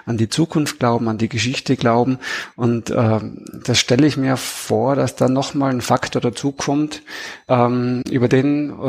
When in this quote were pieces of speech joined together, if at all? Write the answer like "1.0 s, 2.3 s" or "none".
none